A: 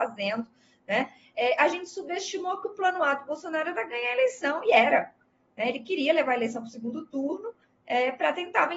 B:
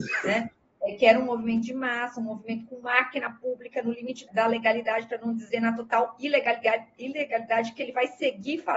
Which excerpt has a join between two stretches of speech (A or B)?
B